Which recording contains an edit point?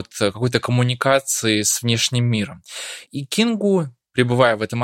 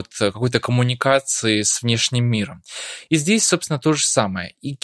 first; 1 cut; at 3.1 s

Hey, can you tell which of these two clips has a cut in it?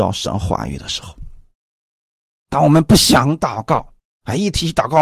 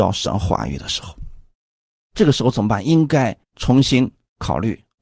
second; 2 cuts; at 1.9 s, 3.4 s

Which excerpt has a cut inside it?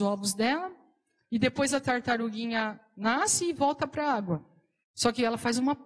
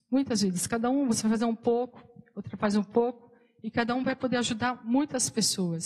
first; 1 cut; at 4.8 s

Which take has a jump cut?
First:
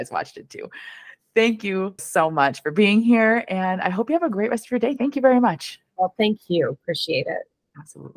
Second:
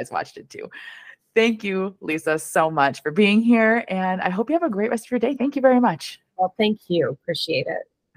first; 1 cut; at 2.0 s

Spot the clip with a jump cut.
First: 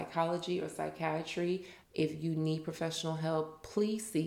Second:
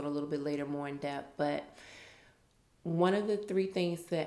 first; 1 cut; at 1.8 s

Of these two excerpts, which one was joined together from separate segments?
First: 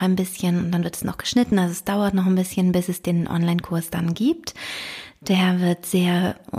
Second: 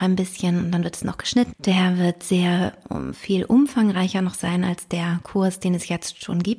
second; 1 cut; at 1.5 s

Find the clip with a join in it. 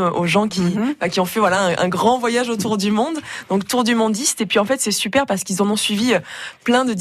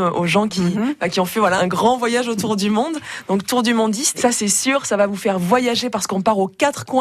second; 2 cuts; at 1.6 s, 4.1 s

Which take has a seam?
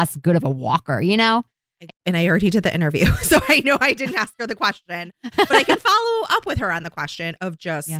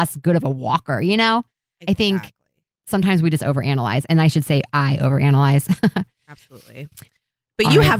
first; 1 cut; at 1.9 s

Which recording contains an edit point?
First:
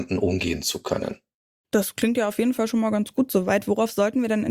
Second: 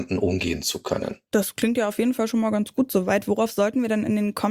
second; 1 cut; at 1.3 s

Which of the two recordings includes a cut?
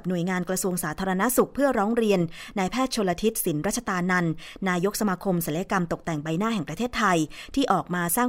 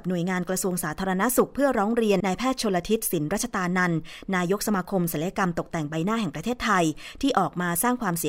second; 1 cut; at 2.2 s

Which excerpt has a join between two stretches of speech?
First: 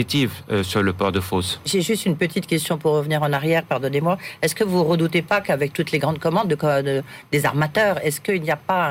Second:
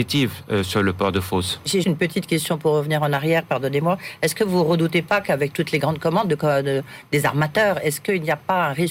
second; 1 cut; at 1.8 s

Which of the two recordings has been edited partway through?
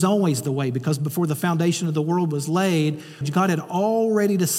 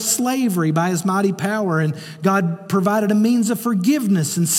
first; 1 cut; at 3.2 s

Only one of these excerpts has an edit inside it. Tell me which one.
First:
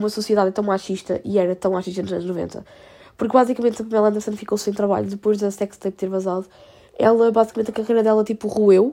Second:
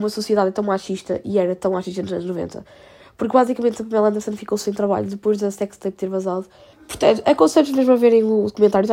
second; 1 cut; at 6.7 s

